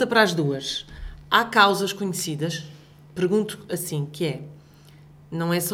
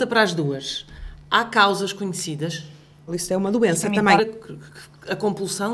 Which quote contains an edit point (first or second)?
second